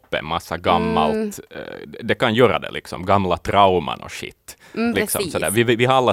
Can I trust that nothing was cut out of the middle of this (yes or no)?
yes